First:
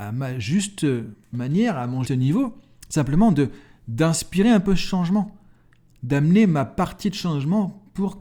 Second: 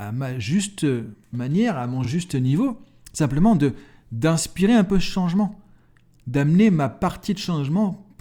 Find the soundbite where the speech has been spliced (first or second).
first